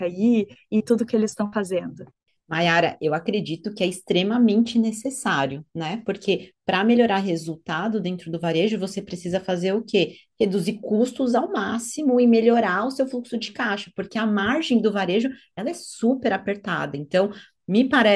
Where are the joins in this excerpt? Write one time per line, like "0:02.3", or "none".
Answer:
none